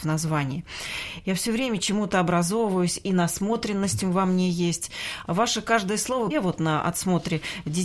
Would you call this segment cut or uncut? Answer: cut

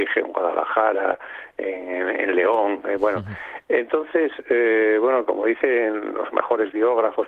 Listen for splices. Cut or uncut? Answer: uncut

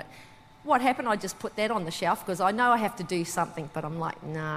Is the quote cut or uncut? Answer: uncut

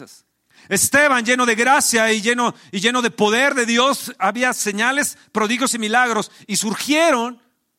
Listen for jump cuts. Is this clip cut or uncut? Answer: uncut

